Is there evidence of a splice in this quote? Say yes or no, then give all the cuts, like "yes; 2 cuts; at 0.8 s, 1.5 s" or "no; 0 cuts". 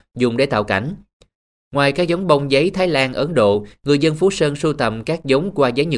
yes; 1 cut; at 1.6 s